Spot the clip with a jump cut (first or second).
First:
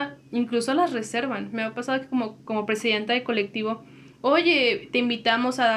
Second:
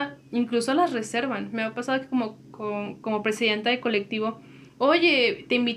first